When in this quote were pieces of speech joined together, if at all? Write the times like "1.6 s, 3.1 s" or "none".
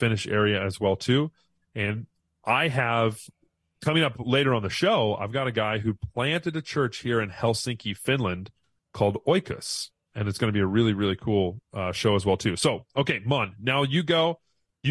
none